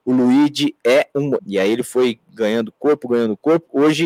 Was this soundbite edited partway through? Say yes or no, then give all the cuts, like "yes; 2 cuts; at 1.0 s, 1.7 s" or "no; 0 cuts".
yes; 1 cut; at 1.4 s